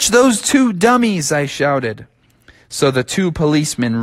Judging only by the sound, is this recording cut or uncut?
uncut